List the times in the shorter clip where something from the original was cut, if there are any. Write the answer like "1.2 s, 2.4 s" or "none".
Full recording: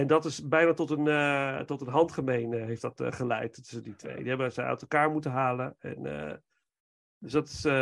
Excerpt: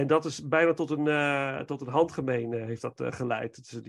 none